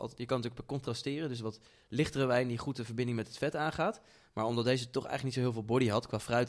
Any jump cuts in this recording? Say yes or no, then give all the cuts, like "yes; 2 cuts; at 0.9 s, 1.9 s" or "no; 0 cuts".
no; 0 cuts